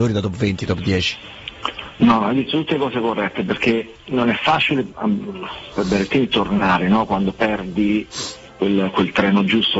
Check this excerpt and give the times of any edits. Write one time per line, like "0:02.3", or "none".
none

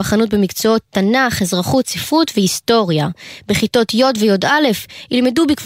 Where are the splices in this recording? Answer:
0:03.4

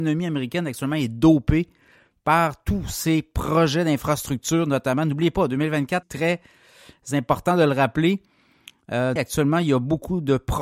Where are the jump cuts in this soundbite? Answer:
0:06.0
0:09.2

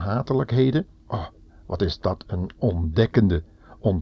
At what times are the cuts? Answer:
0:01.0

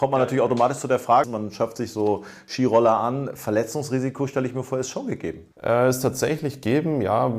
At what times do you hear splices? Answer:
0:01.2
0:05.5

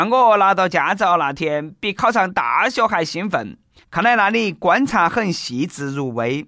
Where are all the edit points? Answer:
0:03.8

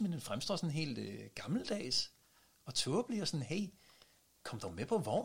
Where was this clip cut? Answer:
none

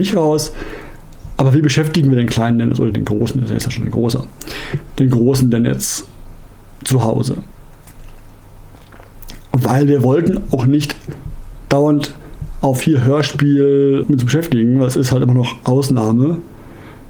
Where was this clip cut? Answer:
0:02.9
0:14.0

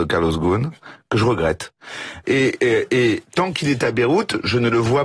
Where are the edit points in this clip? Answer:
0:02.2

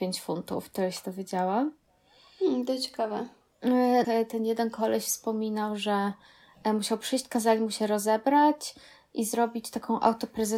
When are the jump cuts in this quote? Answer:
0:04.0

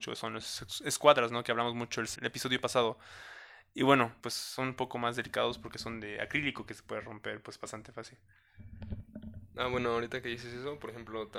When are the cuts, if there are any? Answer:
0:02.2
0:04.2

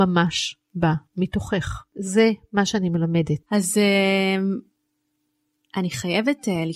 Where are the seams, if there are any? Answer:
0:03.4

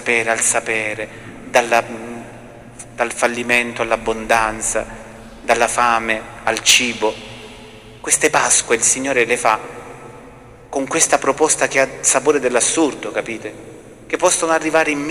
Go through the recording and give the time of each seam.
none

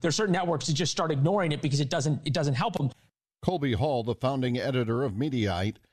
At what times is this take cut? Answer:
none

